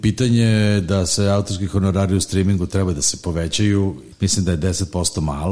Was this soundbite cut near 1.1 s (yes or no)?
no